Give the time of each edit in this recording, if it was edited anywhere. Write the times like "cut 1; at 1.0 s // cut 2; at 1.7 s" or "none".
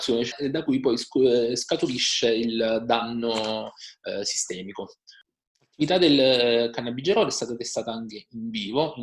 none